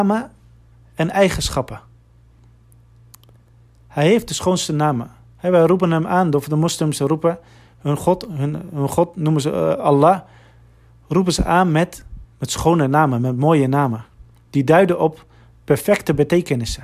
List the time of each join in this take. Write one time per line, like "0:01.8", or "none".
0:12.3